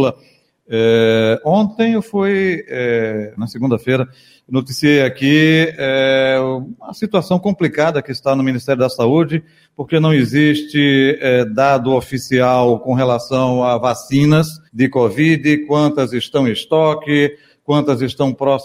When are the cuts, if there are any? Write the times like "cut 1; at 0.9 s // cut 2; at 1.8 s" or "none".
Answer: cut 1; at 3.4 s // cut 2; at 14.7 s